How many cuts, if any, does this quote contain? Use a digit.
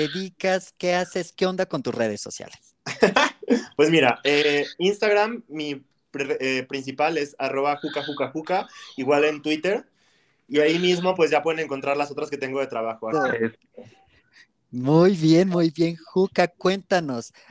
1